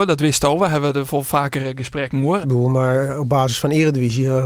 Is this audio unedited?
no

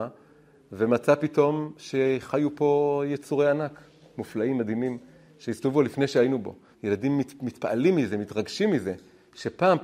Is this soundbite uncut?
no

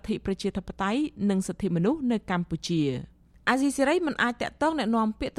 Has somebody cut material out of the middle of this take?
no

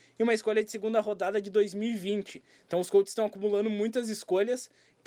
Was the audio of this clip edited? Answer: no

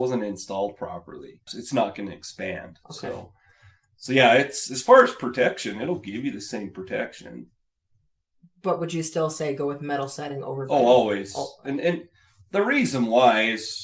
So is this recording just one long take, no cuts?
no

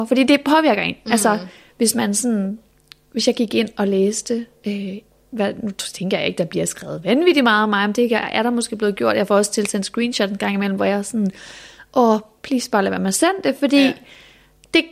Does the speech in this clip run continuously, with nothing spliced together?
yes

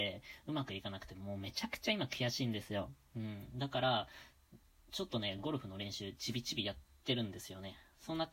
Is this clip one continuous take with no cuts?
yes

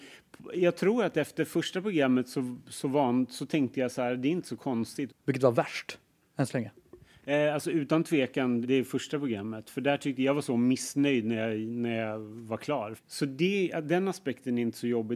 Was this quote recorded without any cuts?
no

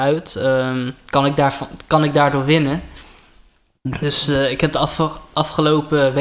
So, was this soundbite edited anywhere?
no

